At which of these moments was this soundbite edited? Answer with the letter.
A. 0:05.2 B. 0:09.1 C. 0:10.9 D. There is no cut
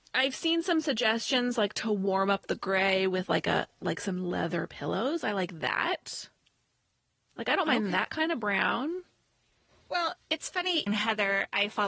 C